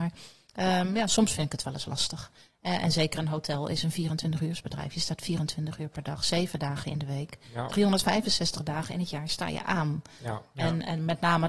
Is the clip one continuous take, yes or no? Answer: yes